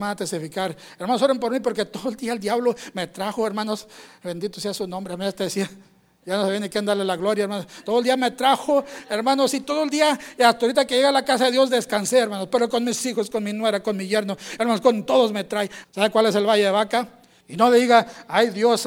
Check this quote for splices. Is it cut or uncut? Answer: cut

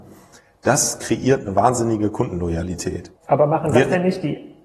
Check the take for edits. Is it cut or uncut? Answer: cut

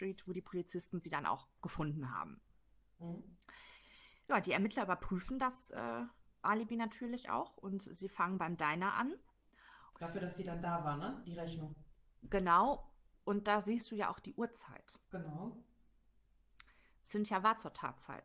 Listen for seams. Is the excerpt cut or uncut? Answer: cut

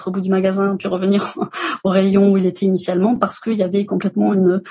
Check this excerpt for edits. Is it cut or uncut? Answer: uncut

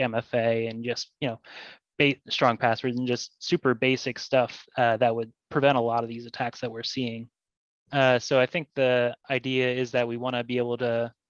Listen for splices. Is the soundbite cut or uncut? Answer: cut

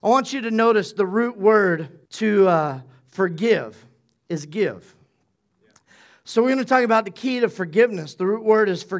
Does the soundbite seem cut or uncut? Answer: cut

